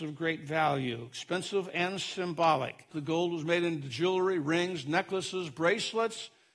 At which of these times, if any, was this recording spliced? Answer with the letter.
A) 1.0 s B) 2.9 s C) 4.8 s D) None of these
B